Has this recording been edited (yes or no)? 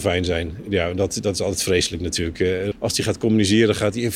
yes